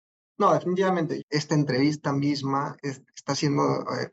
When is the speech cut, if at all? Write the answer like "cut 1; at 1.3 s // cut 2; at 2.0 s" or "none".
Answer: cut 1; at 1.2 s // cut 2; at 2.8 s